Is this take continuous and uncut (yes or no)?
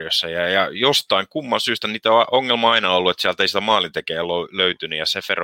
yes